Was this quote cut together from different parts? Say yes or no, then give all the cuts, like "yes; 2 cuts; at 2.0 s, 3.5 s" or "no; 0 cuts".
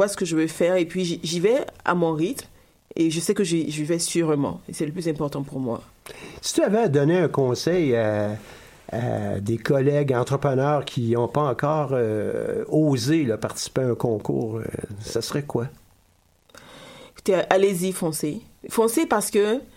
no; 0 cuts